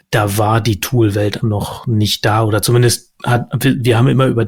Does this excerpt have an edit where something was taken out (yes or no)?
yes